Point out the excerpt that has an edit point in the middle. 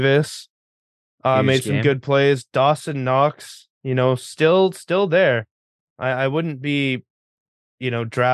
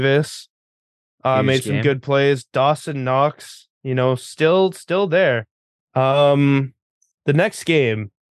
second; 1 cut; at 5.9 s

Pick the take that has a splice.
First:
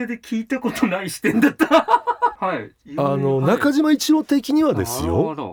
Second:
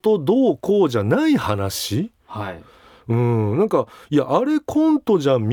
first; 1 cut; at 2.3 s

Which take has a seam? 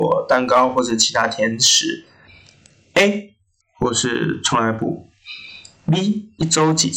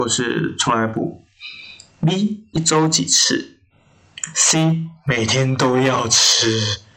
first; 1 cut; at 3.6 s

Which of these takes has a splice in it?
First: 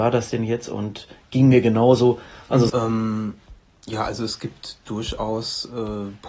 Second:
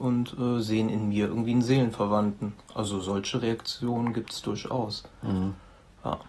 first; 1 cut; at 2.7 s

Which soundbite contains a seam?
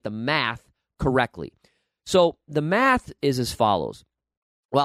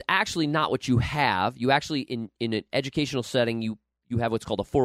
first; 1 cut; at 3.2 s

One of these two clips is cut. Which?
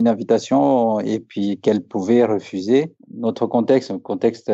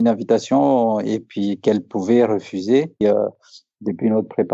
second; 1 cut; at 3.0 s

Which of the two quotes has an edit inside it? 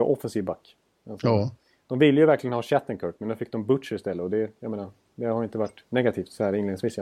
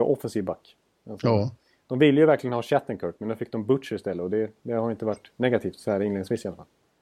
second; 1 cut; at 4.6 s

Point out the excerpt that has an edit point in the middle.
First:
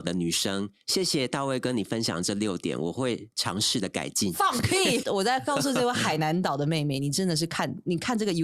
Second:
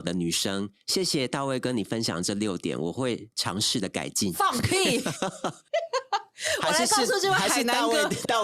first; 1 cut; at 5.0 s

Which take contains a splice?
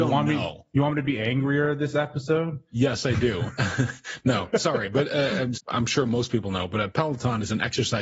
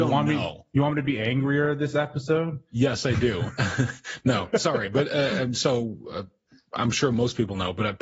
first; 1 cut; at 5.5 s

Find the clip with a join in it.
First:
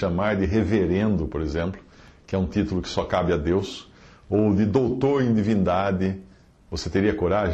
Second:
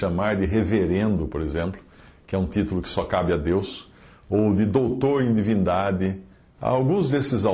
second; 1 cut; at 6.5 s

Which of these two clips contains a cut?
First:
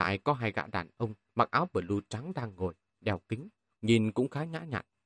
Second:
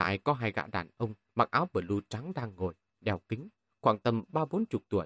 first; 1 cut; at 3.8 s

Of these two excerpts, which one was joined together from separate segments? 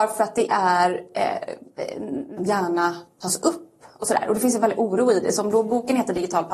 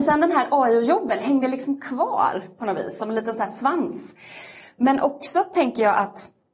first; 1 cut; at 2.4 s

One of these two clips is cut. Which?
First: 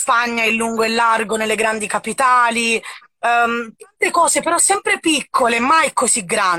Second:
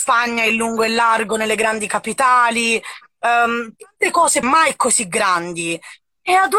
second; 1 cut; at 4.4 s

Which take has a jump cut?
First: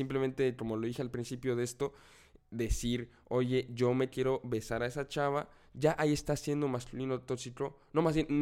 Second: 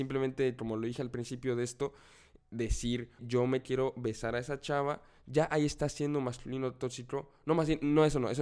second; 1 cut; at 3.2 s

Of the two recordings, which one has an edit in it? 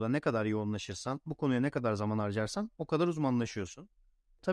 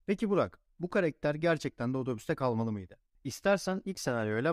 second; 1 cut; at 3.2 s

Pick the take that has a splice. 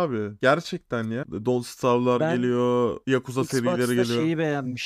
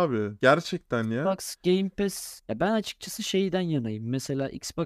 first; 1 cut; at 1.2 s

